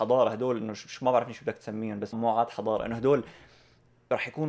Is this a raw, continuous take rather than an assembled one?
no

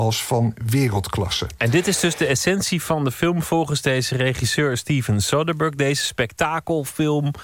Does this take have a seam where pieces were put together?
no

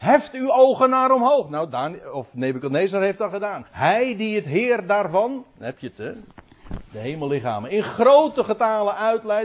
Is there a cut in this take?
yes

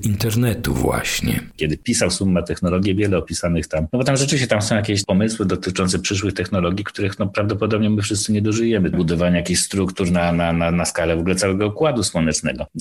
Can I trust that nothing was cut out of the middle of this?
no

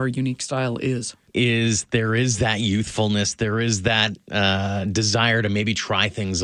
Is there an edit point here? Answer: yes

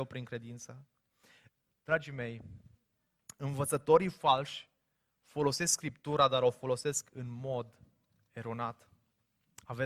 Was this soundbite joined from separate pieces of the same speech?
no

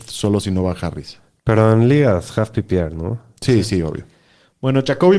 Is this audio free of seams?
yes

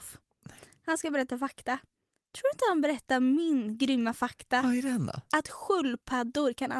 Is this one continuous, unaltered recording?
yes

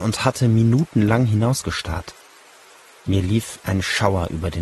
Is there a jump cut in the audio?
no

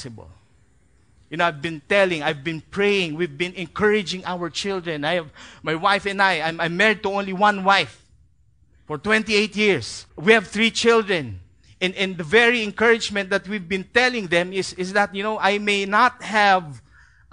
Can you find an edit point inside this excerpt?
yes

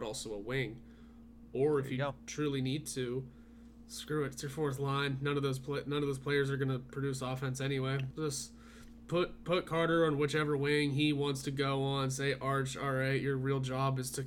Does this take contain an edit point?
yes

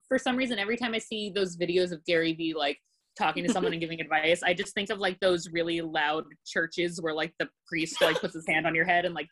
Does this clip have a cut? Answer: no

